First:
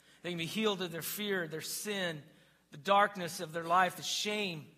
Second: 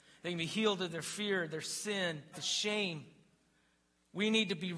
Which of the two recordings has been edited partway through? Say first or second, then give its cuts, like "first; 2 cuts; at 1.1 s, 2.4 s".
second; 1 cut; at 2.3 s